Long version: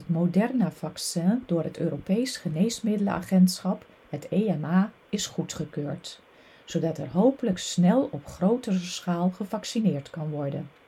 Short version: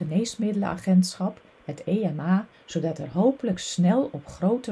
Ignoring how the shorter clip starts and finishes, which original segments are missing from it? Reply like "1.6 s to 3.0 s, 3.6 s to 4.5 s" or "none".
5.0 s to 6.5 s